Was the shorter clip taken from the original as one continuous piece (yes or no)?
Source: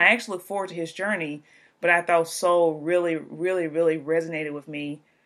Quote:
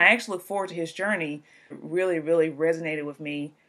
no